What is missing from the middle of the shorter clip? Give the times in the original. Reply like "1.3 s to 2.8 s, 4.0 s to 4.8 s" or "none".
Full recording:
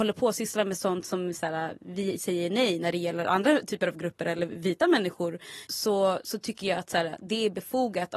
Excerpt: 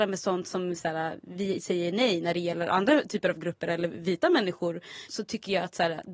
5.7 s to 6.2 s